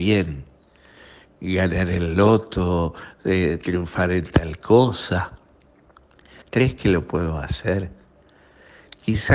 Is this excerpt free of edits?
no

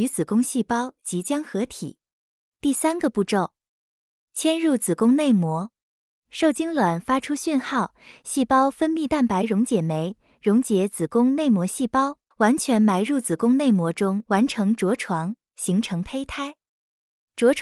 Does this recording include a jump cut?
yes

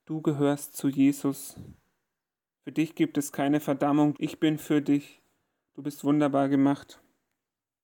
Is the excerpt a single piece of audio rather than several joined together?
no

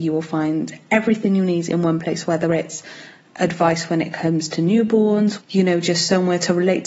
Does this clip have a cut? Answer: yes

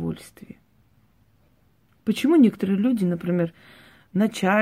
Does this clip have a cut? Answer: no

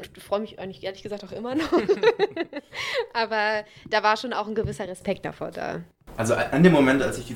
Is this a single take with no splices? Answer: yes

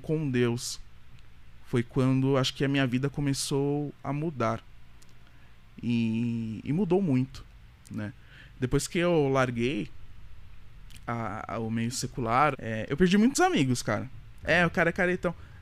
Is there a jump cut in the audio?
yes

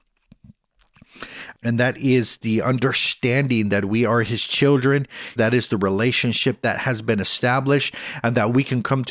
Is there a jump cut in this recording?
yes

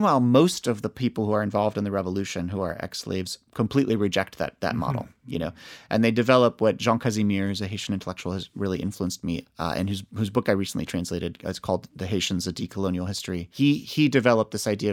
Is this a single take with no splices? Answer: yes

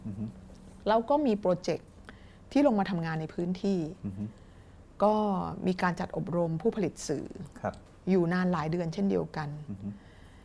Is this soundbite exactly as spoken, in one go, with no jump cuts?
yes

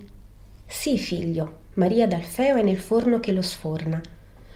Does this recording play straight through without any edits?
no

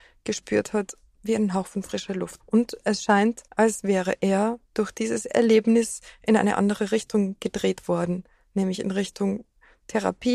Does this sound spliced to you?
yes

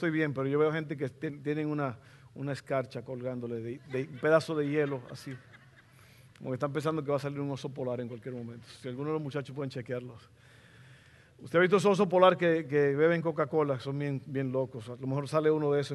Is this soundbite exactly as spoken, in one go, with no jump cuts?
yes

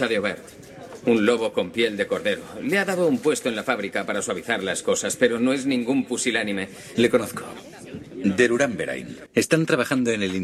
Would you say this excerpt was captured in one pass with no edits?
no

